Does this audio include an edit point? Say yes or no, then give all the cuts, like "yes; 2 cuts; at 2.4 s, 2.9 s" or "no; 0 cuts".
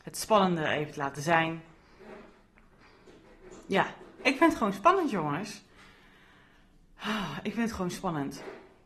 no; 0 cuts